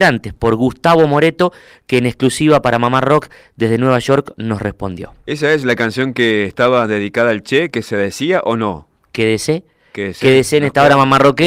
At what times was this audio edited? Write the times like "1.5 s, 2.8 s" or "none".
none